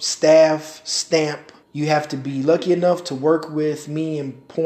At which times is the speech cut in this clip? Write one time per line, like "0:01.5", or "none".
0:01.6